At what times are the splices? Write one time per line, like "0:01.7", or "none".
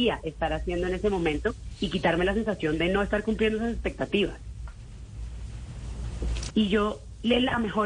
0:06.5